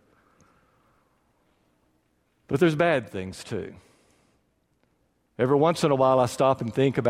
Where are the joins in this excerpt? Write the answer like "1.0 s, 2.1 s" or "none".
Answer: none